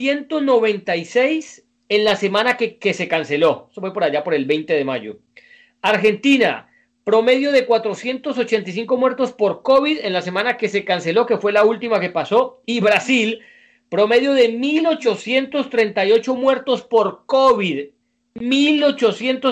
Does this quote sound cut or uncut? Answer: uncut